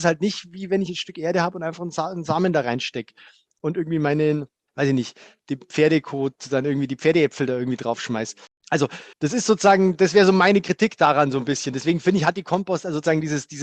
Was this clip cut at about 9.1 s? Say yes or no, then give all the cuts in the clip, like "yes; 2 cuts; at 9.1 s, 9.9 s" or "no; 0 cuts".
yes; 1 cut; at 9.1 s